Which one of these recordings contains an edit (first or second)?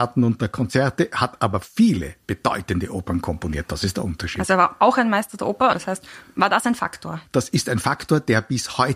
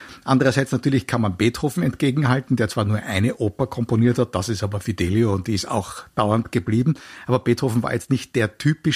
first